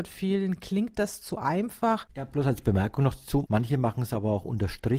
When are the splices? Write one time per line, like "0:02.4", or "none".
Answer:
0:02.1
0:03.5